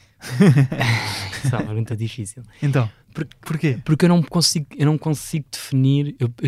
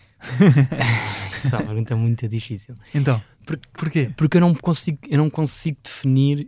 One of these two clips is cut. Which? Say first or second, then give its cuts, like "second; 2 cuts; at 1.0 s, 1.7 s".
first; 1 cut; at 1.9 s